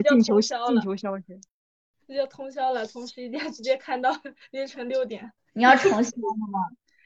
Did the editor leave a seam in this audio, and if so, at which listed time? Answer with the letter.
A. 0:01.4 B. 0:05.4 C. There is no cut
B